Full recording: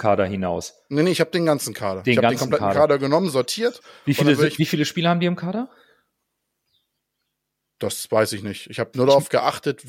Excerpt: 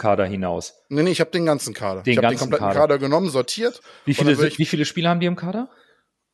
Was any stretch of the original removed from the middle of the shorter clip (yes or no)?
no